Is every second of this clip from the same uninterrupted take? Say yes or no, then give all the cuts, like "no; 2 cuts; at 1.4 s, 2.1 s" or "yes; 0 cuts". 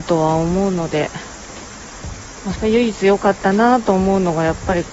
no; 1 cut; at 2.6 s